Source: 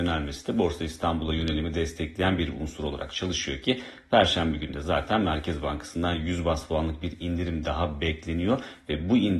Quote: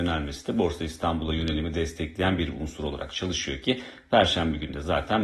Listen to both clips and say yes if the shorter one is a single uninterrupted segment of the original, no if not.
yes